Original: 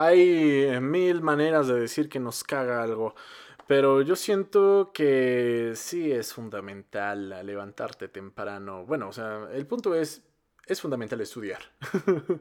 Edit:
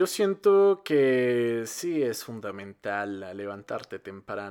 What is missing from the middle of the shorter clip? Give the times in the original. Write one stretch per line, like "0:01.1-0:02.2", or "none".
none